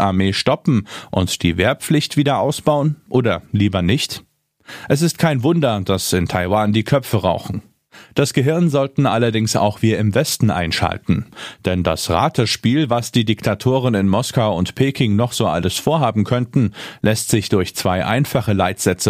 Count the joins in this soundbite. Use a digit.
0